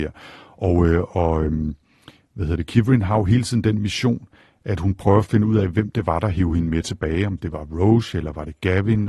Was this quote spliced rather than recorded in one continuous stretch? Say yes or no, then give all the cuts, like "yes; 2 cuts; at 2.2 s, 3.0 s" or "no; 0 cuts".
no; 0 cuts